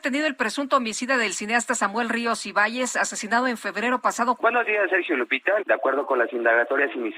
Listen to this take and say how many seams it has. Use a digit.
2